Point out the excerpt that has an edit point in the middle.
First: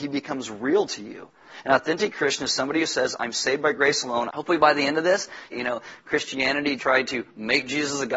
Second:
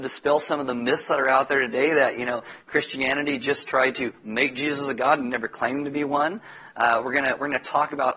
first; 3 cuts; at 4.3 s, 5.5 s, 6.8 s

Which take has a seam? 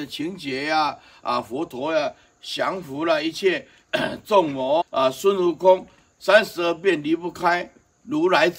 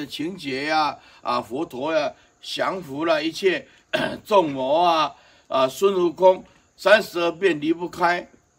first; 1 cut; at 4.8 s

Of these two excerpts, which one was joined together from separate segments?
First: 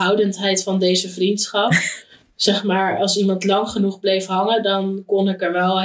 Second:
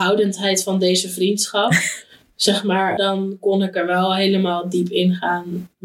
second; 1 cut; at 3.0 s

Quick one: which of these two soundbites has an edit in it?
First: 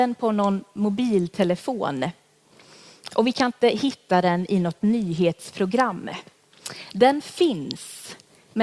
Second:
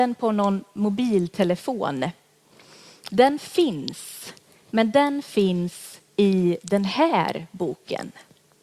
second; 1 cut; at 3.1 s

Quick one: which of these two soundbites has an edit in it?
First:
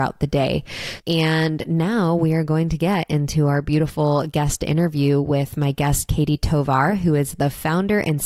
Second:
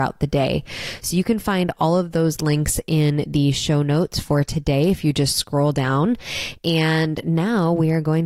first; 1 cut; at 1.0 s

